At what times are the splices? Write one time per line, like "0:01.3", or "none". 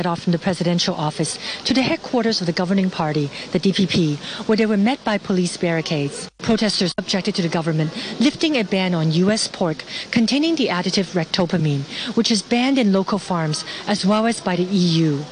none